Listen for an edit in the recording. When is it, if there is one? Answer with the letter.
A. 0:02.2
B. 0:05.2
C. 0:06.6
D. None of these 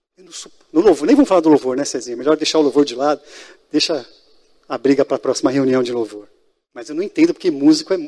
D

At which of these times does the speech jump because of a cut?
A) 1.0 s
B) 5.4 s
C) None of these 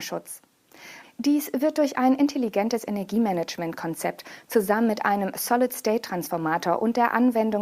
A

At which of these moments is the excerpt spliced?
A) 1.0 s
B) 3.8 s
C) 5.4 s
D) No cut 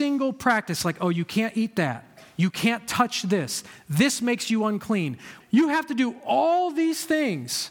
C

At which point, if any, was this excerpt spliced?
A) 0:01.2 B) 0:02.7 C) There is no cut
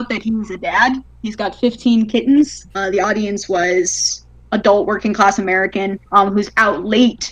B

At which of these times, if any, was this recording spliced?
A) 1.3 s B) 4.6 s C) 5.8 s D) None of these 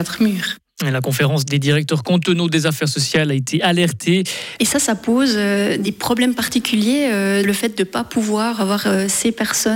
B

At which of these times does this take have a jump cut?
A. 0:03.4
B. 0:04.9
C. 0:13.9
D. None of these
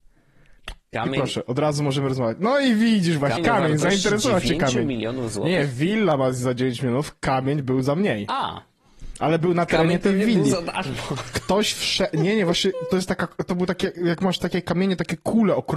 A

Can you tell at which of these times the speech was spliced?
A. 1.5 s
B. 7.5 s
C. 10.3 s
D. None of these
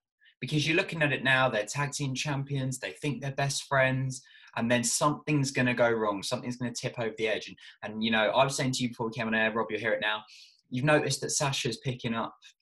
D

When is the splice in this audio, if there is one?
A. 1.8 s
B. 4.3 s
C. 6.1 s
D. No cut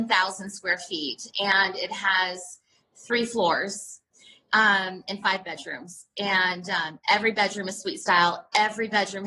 D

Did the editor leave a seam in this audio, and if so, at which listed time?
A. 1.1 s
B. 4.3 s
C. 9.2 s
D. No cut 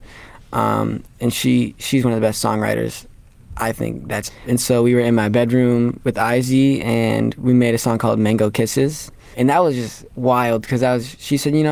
B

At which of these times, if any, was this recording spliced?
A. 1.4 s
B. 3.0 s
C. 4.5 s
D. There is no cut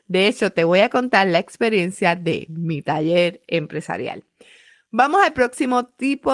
D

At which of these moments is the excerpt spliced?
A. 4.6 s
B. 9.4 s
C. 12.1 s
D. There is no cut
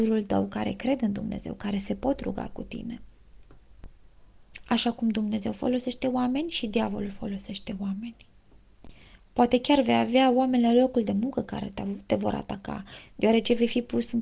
D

